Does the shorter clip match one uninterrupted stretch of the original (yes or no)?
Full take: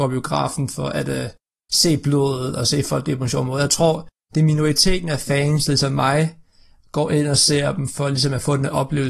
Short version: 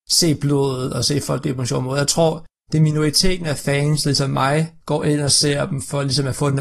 no